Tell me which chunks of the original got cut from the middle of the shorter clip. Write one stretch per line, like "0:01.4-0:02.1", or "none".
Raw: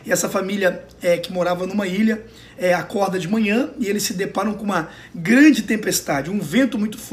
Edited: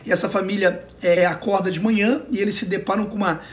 0:01.2-0:02.6